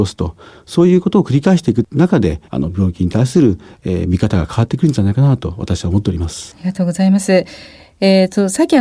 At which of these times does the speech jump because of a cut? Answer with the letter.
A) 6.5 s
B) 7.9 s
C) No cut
C